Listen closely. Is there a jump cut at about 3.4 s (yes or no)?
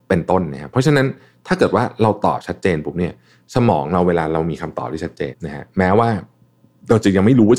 no